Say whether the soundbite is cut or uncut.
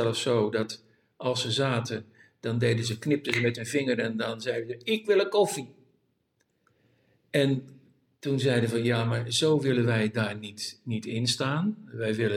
uncut